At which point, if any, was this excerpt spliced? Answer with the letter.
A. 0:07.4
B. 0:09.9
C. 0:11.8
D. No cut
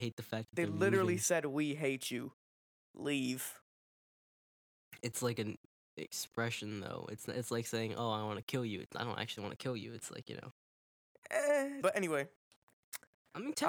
C